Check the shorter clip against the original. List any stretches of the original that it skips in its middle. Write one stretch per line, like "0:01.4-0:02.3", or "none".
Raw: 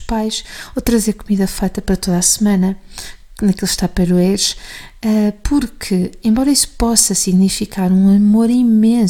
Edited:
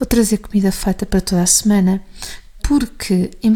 0:03.3-0:05.4